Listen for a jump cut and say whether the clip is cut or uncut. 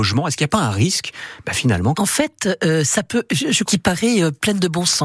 cut